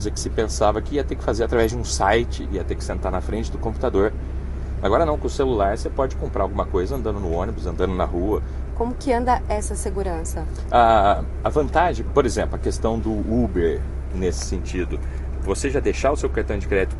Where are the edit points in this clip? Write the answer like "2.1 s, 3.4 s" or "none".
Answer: 8.7 s